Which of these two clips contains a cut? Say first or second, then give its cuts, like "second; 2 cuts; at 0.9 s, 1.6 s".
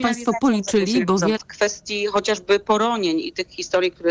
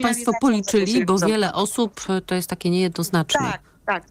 first; 1 cut; at 1.4 s